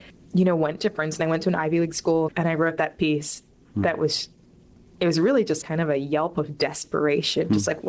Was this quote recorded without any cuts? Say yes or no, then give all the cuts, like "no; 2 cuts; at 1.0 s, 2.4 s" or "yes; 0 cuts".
no; 2 cuts; at 2.3 s, 5.6 s